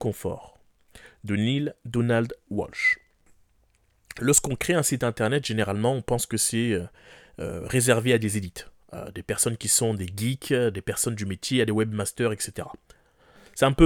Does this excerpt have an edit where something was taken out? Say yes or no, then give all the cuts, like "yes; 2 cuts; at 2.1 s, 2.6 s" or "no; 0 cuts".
no; 0 cuts